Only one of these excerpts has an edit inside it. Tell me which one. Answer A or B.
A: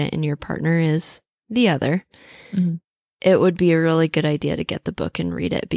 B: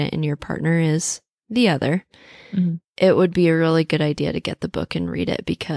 B